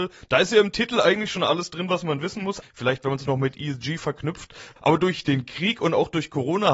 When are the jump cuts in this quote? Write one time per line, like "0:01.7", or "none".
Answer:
0:02.6